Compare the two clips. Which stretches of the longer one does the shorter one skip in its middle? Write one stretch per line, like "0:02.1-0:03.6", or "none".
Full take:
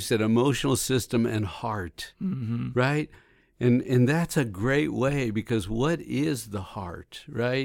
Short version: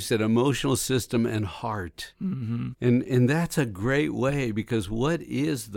0:02.7-0:03.5

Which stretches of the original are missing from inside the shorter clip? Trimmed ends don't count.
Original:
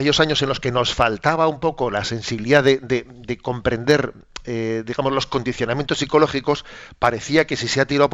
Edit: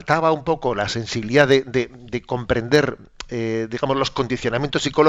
none

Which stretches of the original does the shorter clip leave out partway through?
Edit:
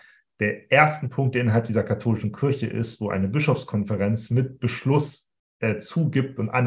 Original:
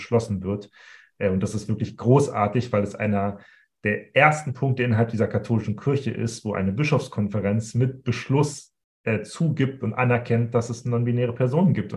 none

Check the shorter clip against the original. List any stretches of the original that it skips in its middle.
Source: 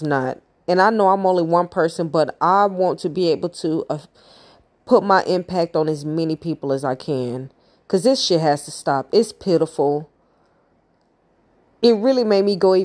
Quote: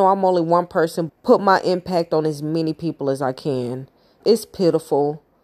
0:02.1-0:04.7
0:07.8-0:09.1

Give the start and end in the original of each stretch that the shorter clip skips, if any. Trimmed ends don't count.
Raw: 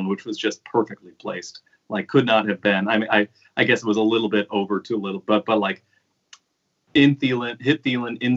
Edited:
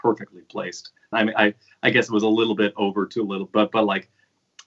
0:01.8-0:02.9

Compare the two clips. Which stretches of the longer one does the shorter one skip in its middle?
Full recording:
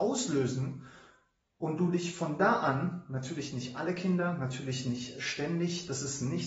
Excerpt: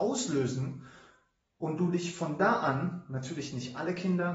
none

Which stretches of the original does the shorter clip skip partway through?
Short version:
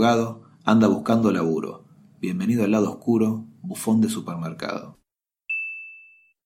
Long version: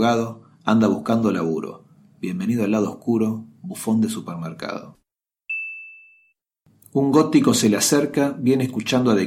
none

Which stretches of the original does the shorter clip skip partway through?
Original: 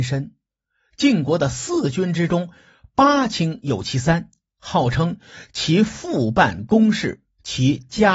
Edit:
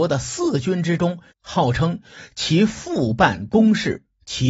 0:02.6-0:04.5

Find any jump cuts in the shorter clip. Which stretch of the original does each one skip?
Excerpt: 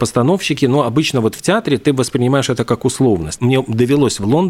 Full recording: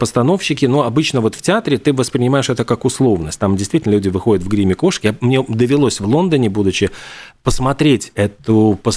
0:03.4-0:05.2

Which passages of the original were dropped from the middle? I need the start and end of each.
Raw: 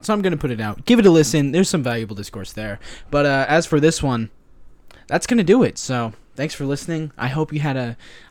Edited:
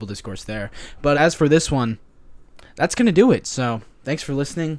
0:03.2-0:03.5

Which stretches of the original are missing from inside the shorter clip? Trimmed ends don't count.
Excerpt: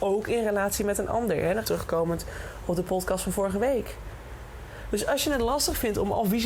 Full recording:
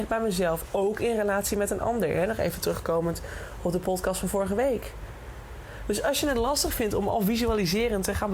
0:02.4-0:02.6

